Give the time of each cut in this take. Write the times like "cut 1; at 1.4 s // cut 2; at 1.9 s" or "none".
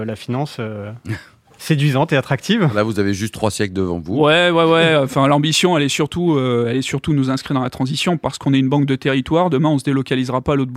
none